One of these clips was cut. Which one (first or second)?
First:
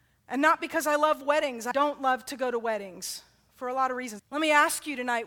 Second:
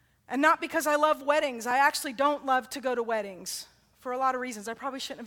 first